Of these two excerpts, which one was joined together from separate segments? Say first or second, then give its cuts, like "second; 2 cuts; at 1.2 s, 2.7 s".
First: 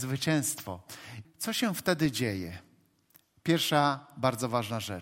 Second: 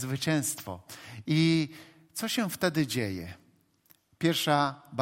first; 1 cut; at 1.2 s